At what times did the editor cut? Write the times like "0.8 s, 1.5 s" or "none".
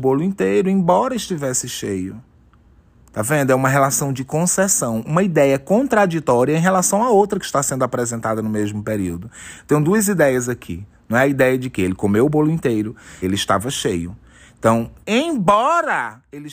5.0 s, 13.2 s, 15.0 s